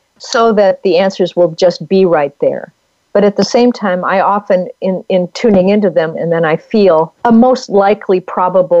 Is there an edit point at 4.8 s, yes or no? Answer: no